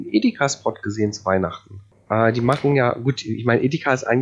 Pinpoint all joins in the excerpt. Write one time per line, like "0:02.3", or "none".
0:02.1